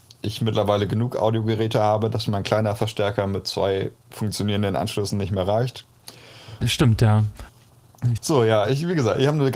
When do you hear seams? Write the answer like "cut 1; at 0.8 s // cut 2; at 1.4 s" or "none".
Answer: cut 1; at 6.6 s // cut 2; at 8.2 s